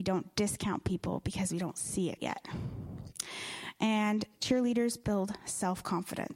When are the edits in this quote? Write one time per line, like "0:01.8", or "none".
0:02.2

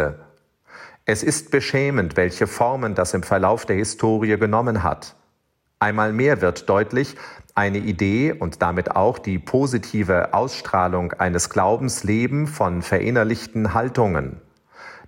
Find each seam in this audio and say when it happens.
none

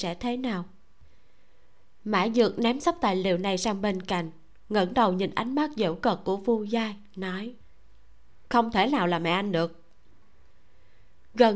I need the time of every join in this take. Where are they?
0:08.5

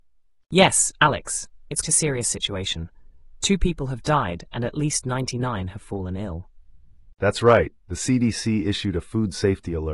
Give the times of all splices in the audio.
0:01.8
0:07.1

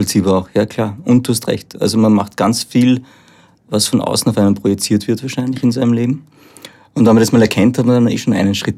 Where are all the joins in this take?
none

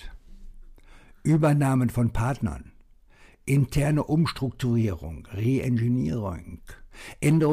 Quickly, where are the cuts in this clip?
none

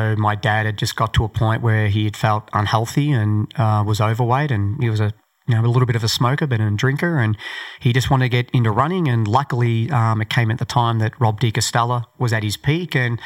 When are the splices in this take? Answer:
none

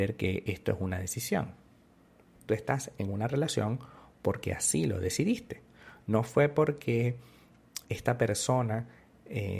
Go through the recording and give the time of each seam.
0:07.8

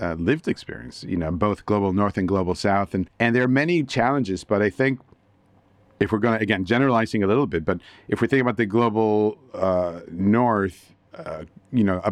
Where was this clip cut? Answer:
none

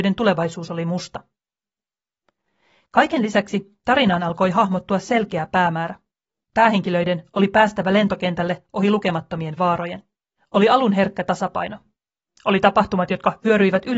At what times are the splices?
0:10.4

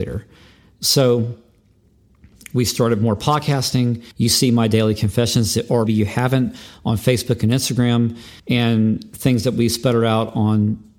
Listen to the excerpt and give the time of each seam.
0:04.1
0:05.9
0:08.4

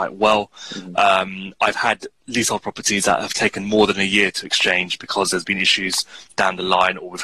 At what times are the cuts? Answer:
none

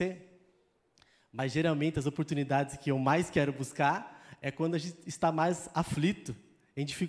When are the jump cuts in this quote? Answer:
none

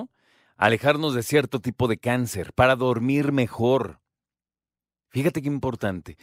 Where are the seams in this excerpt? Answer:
none

